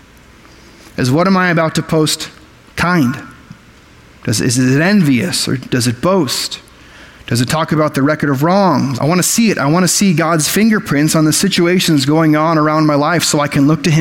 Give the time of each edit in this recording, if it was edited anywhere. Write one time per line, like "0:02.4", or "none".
0:09.0